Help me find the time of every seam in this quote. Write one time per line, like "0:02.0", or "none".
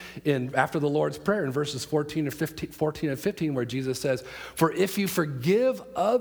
none